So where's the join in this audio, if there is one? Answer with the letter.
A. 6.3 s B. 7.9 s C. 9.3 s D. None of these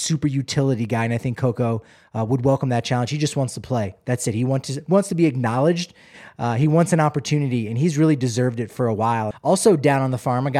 C